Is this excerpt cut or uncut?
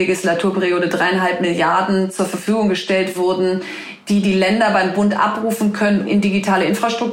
cut